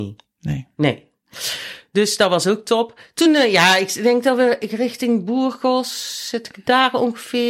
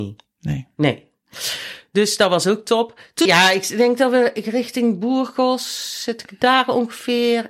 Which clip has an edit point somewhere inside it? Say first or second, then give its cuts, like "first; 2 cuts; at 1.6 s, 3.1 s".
second; 1 cut; at 3.3 s